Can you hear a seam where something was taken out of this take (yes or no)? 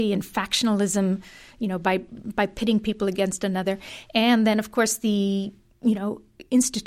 no